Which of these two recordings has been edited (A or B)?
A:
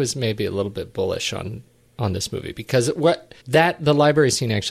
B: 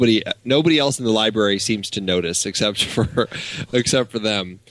A